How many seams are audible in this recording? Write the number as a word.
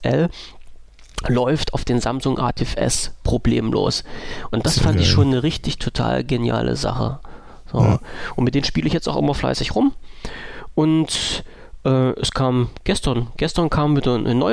zero